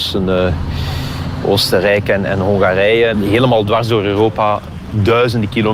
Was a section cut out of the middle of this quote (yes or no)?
yes